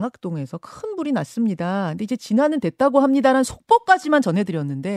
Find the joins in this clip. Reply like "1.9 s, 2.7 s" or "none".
none